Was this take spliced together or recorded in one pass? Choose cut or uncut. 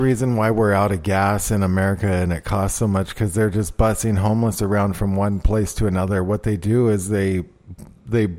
uncut